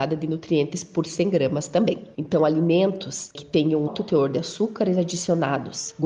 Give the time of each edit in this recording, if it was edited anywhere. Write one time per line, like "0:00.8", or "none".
0:02.1
0:03.9